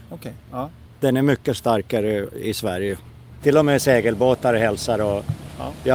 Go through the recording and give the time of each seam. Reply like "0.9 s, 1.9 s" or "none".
3.4 s